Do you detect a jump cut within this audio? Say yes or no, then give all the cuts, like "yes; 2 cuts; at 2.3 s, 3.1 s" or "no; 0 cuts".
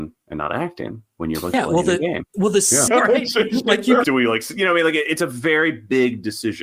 yes; 2 cuts; at 2.9 s, 4.0 s